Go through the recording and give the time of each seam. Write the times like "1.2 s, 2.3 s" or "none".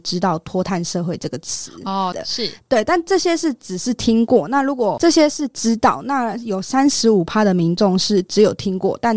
2.1 s